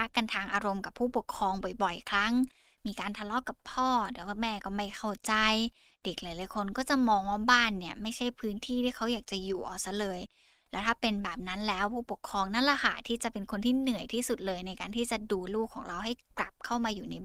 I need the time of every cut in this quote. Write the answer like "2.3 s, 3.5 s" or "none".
15.5 s